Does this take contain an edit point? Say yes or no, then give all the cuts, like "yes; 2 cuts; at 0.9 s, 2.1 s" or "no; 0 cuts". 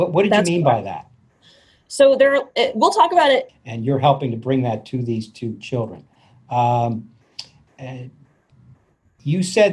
yes; 1 cut; at 3.5 s